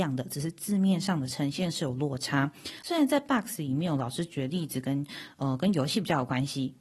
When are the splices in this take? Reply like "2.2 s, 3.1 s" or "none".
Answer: 2.8 s